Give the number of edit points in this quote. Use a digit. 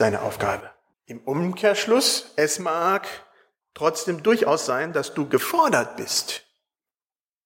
1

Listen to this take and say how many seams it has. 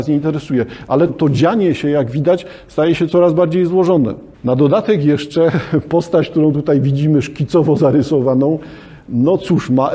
2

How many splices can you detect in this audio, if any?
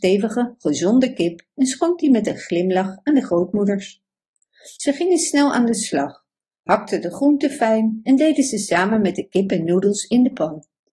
1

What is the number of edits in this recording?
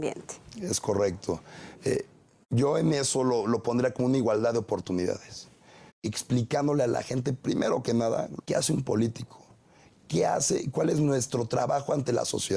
2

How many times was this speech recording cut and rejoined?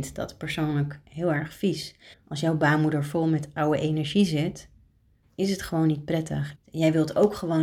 2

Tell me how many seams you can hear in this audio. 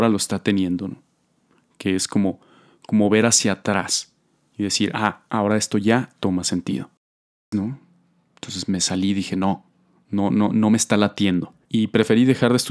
1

